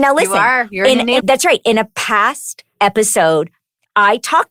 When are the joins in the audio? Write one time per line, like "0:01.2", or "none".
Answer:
0:01.2